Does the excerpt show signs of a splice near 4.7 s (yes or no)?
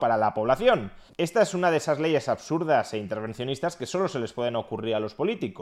no